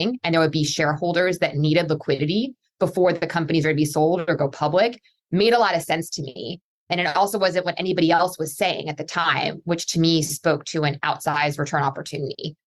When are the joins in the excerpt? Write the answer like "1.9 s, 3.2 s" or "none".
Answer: none